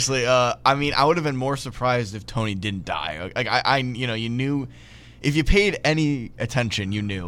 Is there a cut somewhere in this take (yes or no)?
no